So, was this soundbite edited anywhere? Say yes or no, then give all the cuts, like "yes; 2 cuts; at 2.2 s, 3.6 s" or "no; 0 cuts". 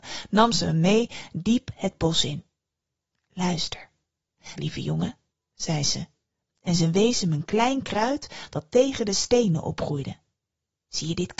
yes; 1 cut; at 4.6 s